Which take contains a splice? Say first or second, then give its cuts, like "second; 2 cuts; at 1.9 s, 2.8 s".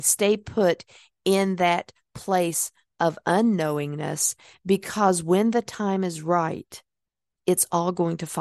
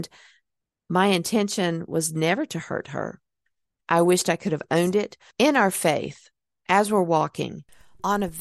second; 2 cuts; at 3.8 s, 5.3 s